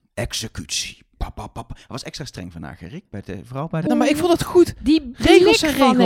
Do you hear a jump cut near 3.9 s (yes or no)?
yes